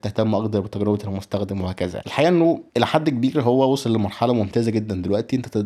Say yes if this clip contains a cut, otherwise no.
yes